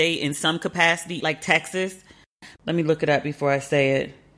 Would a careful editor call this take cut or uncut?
cut